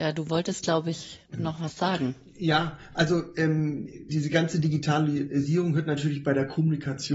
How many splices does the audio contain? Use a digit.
1